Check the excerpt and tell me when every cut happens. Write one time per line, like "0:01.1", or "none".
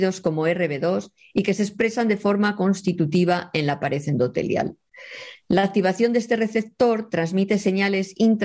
none